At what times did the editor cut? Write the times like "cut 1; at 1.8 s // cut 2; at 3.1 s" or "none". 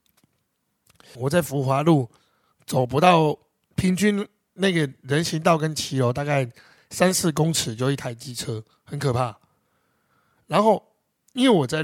cut 1; at 1.1 s